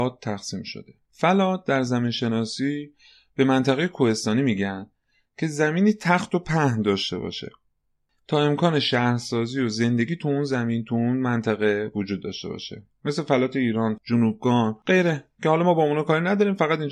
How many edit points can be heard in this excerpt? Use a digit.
1